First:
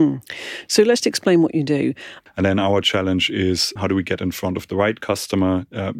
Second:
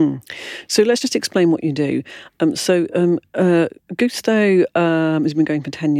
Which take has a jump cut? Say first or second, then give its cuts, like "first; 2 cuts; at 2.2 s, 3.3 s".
first; 3 cuts; at 1.0 s, 2.3 s, 3.8 s